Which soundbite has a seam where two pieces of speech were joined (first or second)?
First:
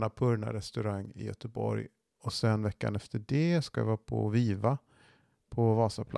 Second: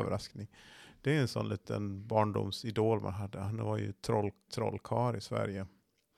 second